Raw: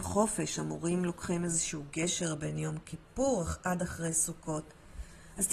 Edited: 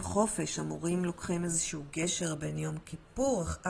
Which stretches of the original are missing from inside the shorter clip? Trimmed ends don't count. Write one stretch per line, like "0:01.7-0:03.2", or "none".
none